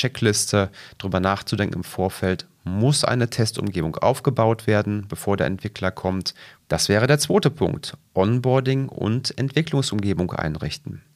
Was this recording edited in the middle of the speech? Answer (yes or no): yes